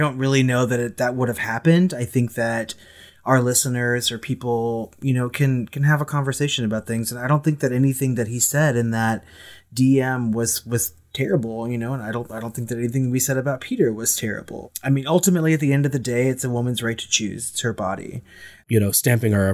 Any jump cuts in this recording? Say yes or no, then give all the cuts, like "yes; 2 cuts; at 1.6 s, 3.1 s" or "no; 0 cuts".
yes; 1 cut; at 18.6 s